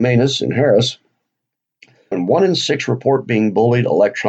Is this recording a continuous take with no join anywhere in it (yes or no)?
no